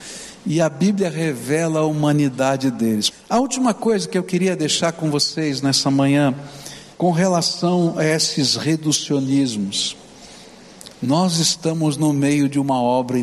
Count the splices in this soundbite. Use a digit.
3